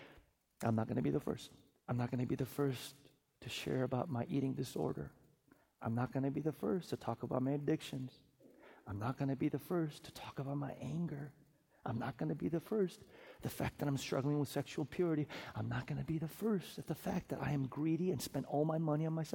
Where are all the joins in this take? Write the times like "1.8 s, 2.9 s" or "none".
1.8 s